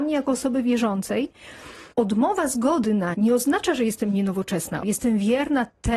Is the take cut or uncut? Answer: cut